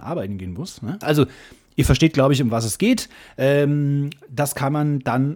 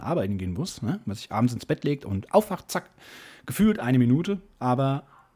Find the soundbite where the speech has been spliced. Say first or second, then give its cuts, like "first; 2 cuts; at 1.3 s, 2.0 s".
first; 1 cut; at 1.0 s